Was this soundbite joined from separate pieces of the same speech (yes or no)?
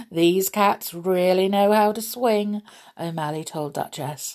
no